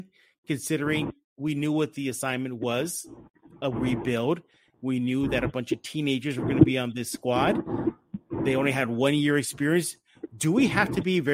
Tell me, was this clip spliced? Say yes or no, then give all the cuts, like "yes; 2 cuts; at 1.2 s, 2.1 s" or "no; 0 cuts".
no; 0 cuts